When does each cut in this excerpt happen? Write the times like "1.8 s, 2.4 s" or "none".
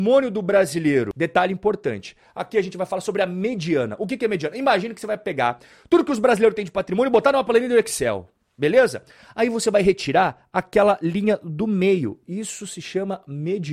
none